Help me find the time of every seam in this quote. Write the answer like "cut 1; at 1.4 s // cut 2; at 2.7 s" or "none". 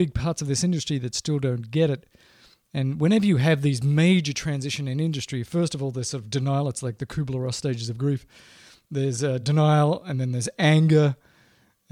none